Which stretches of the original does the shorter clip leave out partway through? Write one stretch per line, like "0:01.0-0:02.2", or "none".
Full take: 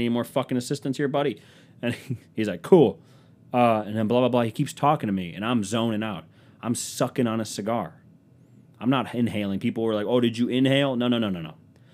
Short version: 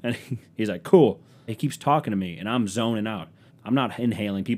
0:03.3-0:04.4
0:06.4-0:08.6